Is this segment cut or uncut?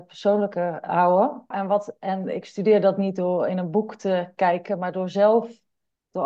cut